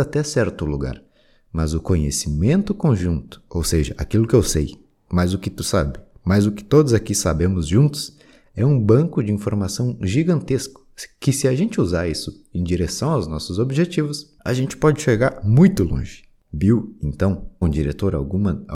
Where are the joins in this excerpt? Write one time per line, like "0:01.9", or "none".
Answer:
0:16.4
0:17.6